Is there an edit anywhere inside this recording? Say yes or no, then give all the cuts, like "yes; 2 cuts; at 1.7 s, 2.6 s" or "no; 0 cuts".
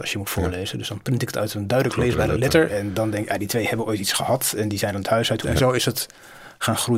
yes; 2 cuts; at 2.7 s, 5.4 s